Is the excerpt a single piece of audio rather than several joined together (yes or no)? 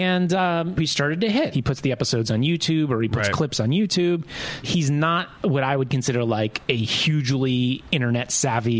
no